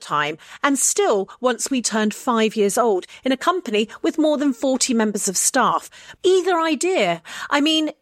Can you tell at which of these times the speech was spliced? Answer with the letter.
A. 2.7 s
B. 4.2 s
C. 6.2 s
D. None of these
C